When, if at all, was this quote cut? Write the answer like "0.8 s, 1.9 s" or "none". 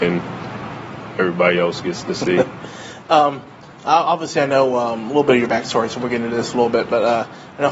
none